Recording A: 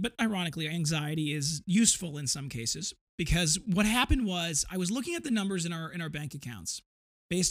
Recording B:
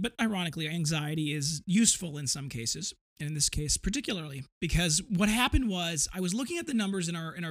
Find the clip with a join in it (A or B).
A